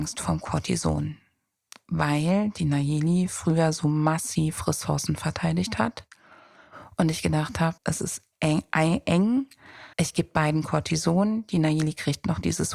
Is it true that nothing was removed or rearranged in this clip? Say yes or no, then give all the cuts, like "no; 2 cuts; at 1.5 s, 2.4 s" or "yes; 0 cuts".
no; 2 cuts; at 7.8 s, 9.9 s